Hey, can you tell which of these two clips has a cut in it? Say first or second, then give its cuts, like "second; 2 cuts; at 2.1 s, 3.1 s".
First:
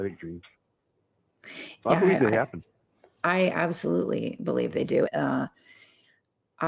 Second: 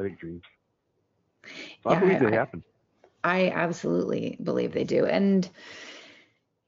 first; 1 cut; at 5.1 s